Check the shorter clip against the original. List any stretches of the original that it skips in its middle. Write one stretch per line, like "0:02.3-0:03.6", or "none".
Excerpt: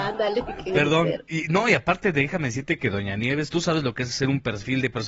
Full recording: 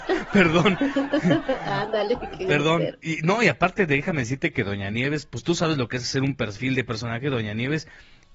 0:05.2-0:05.4

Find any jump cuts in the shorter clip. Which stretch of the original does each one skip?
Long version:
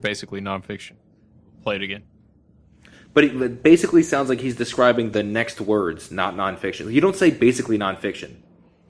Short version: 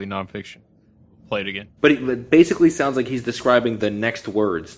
0:02.1-0:03.1

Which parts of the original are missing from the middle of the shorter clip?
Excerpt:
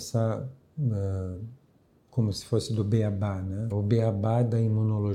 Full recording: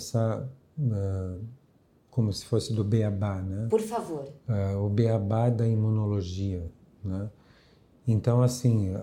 0:03.7-0:04.8

